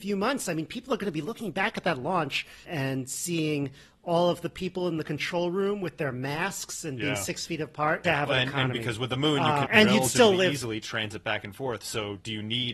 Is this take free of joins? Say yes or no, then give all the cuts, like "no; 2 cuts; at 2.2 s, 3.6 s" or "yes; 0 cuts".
no; 3 cuts; at 2.6 s, 8.0 s, 9.6 s